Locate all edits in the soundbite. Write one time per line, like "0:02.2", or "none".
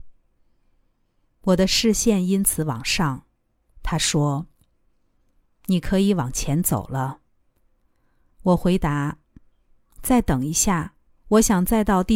0:03.7